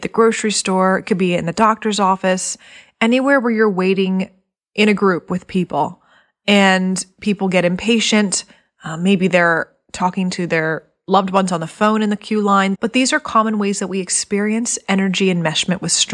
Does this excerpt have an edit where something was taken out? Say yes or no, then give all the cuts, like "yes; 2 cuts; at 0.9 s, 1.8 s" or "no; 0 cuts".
yes; 1 cut; at 12.8 s